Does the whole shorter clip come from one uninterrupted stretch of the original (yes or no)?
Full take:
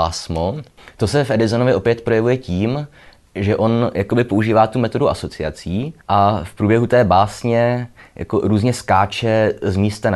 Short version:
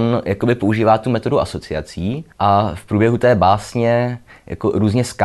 yes